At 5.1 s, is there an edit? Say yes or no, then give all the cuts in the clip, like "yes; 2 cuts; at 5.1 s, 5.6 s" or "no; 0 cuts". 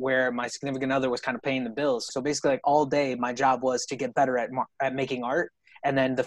no; 1 cut; at 2.1 s